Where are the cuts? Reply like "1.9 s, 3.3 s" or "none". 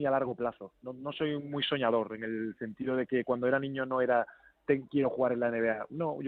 none